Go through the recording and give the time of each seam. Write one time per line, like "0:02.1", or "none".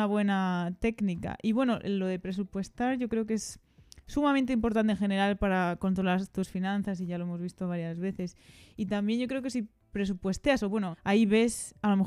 0:10.9